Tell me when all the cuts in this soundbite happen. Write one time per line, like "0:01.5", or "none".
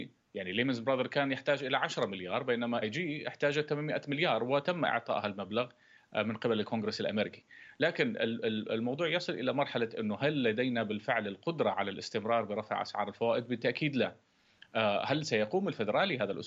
0:02.8